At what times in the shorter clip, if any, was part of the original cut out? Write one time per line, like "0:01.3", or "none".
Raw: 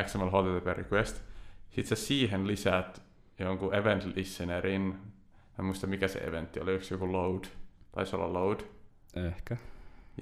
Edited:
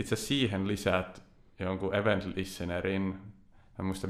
none